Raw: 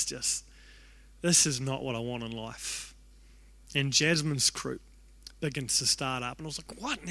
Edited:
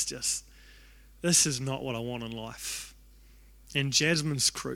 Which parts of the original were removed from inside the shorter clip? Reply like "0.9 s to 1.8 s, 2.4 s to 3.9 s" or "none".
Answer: none